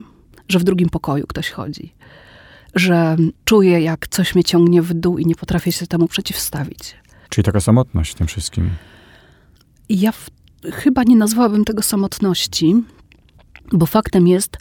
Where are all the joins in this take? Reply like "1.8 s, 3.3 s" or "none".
7.3 s